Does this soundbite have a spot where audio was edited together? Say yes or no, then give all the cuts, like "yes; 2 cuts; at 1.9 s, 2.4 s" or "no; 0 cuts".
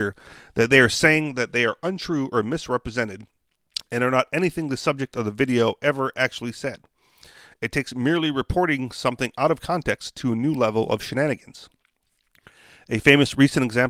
no; 0 cuts